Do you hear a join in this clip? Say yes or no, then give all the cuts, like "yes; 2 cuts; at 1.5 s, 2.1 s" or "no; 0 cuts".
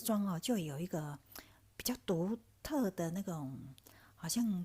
no; 0 cuts